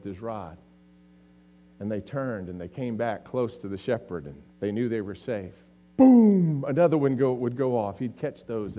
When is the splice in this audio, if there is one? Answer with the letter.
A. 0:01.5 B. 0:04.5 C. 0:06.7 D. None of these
B